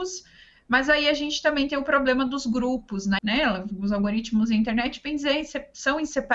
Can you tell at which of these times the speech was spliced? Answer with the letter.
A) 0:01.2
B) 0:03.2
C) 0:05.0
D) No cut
B